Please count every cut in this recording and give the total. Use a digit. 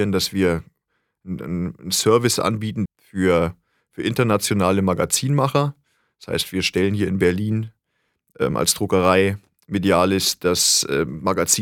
1